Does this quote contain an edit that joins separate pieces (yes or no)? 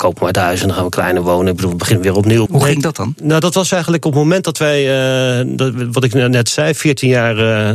yes